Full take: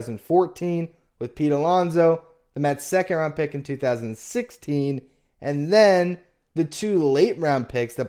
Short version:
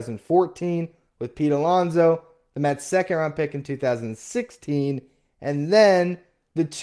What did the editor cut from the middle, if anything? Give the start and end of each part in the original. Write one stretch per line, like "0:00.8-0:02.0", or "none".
none